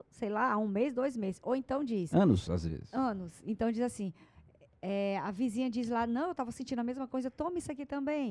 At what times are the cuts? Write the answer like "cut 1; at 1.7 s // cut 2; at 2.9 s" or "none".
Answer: none